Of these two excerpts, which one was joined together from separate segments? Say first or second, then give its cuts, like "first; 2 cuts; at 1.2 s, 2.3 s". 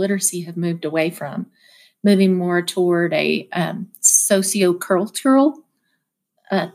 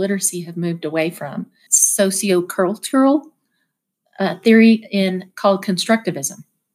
second; 1 cut; at 1.7 s